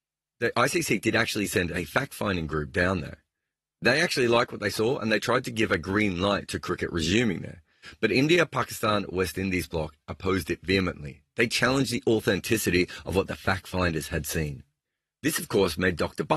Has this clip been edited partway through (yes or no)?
no